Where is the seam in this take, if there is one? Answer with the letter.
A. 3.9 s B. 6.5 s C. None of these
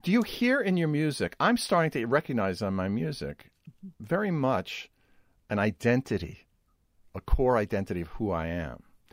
A